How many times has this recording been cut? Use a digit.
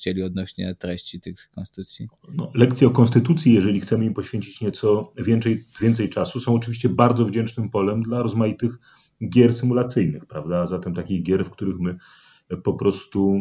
0